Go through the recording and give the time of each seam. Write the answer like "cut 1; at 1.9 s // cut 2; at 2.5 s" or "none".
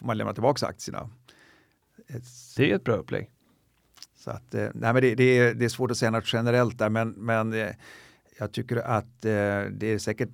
cut 1; at 2.6 s // cut 2; at 4.1 s